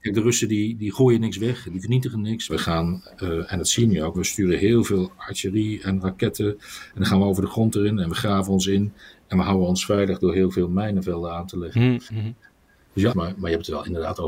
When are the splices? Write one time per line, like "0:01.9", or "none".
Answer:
0:02.5
0:04.1
0:13.1